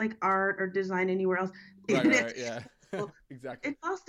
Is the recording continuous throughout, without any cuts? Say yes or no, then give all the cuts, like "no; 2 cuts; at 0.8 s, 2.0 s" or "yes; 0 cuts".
no; 1 cut; at 1.9 s